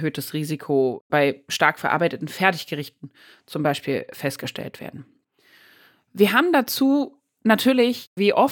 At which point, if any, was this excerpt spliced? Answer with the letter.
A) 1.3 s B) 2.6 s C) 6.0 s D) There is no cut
D